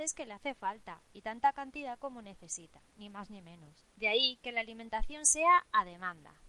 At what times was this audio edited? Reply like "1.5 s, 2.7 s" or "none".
3.9 s